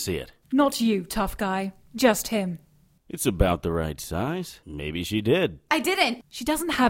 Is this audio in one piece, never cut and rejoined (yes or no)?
yes